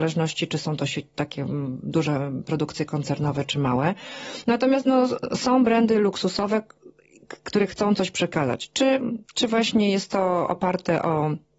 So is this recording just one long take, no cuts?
no; 1 cut; at 9.2 s

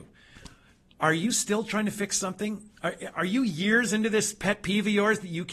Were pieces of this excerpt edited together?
no; 0 cuts

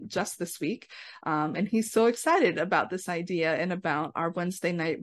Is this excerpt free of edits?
yes; 0 cuts

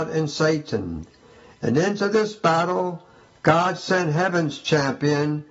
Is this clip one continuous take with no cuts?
yes; 0 cuts

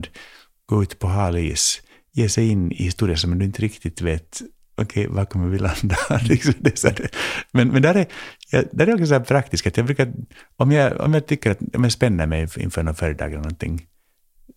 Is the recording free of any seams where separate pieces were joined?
yes; 0 cuts

